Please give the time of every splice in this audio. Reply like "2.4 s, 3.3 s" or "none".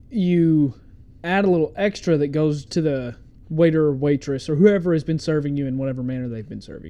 2.7 s